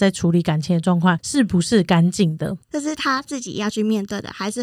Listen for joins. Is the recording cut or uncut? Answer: cut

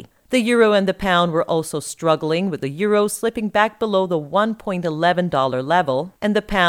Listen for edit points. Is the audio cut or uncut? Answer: uncut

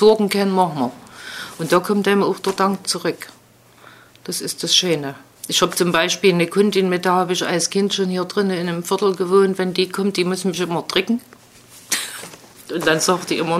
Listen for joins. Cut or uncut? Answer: uncut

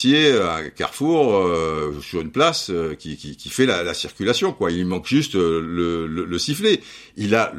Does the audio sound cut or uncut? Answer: uncut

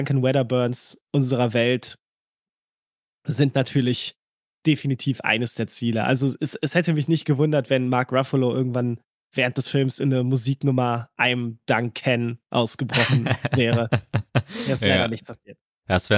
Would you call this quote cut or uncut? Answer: uncut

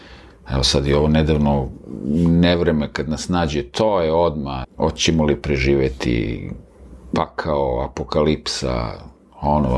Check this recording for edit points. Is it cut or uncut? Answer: cut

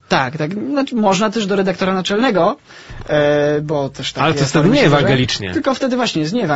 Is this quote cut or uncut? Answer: uncut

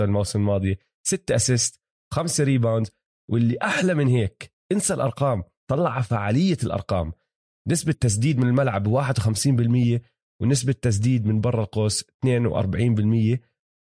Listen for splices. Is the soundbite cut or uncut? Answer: cut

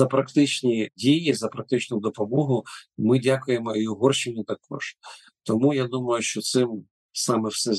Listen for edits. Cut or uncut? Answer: uncut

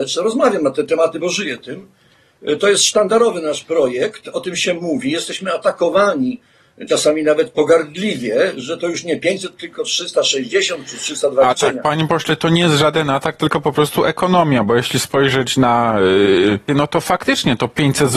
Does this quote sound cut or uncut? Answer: cut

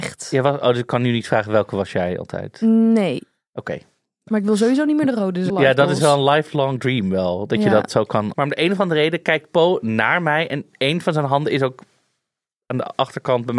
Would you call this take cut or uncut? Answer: cut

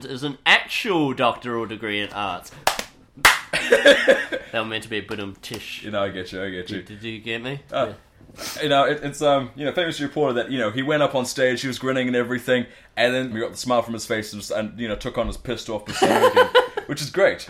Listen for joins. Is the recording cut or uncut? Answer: cut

